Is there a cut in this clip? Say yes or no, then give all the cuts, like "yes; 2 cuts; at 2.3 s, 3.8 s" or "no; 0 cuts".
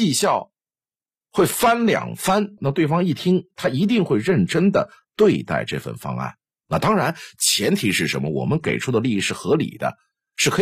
yes; 1 cut; at 2.6 s